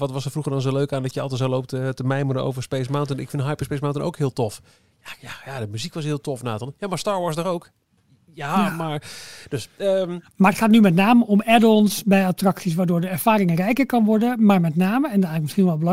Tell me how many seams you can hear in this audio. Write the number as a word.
zero